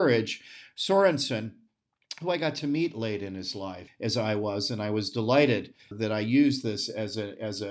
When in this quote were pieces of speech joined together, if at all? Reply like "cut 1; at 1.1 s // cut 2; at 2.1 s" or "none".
cut 1; at 3.9 s // cut 2; at 5.9 s

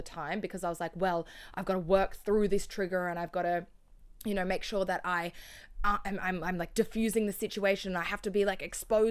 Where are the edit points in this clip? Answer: none

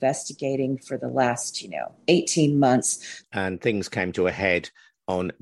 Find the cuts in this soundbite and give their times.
cut 1; at 3.2 s

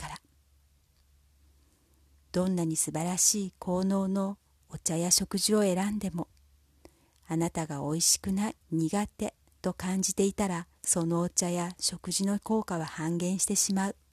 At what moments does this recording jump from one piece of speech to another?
cut 1; at 8.6 s // cut 2; at 10.8 s

